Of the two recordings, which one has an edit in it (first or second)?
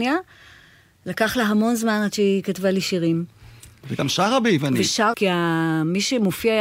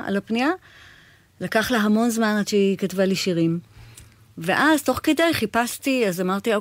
first